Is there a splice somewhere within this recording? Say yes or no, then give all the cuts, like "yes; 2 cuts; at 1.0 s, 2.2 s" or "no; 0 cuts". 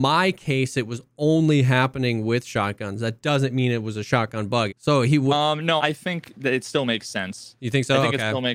yes; 2 cuts; at 4.7 s, 5.8 s